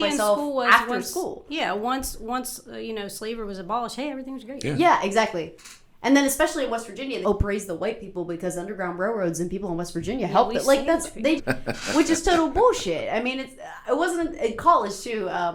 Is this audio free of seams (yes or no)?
no